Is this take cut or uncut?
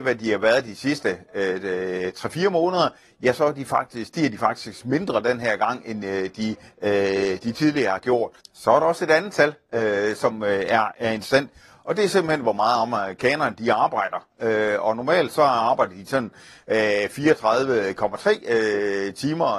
cut